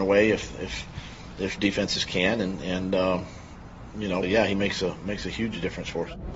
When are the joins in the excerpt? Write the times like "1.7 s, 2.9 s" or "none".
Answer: 4.2 s